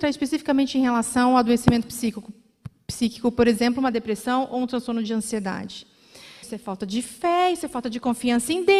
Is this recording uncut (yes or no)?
no